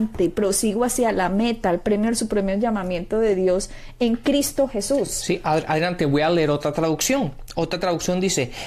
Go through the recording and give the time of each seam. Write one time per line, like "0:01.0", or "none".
none